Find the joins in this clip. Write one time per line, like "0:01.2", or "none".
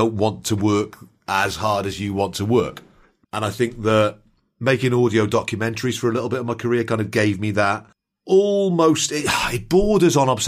0:03.2